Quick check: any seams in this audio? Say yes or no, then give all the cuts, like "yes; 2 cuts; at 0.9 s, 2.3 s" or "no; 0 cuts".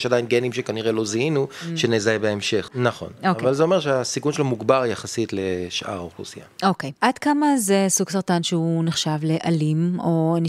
yes; 2 cuts; at 2.7 s, 7.0 s